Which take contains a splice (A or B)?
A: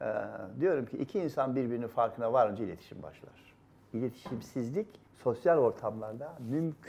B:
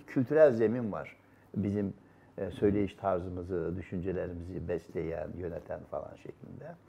A